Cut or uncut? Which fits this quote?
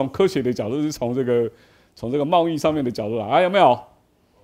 uncut